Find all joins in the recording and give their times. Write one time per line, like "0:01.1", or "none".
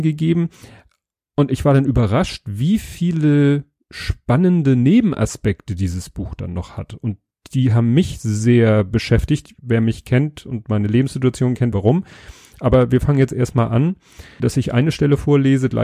0:09.6
0:11.7
0:14.4